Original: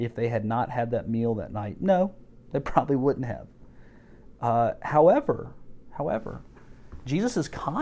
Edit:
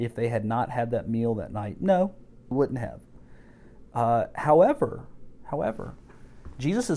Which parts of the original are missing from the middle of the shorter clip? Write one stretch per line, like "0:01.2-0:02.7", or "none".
0:02.5-0:03.0